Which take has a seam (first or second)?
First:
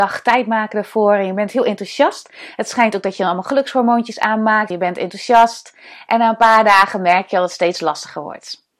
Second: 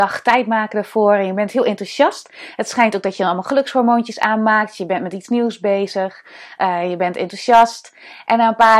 first